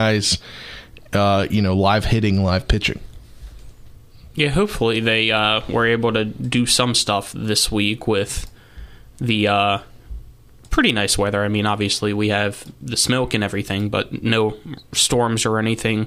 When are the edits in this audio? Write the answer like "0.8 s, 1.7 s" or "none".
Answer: none